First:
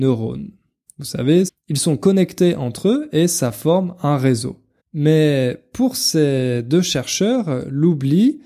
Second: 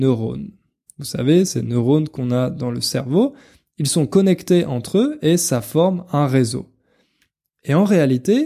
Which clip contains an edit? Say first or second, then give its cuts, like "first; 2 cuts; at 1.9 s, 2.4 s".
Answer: first; 2 cuts; at 1.5 s, 4.8 s